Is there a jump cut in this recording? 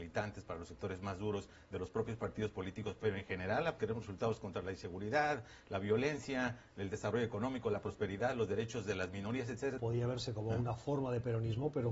yes; 2 cuts; at 3.8 s, 9.8 s

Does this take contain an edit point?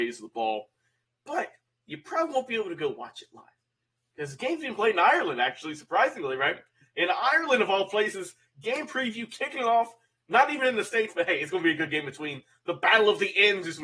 yes; 1 cut; at 1.0 s

